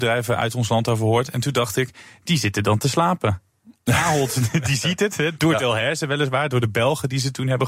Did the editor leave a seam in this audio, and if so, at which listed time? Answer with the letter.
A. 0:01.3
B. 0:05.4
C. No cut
B